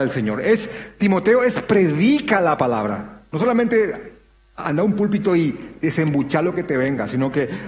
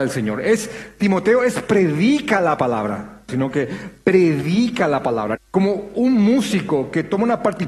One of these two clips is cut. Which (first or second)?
second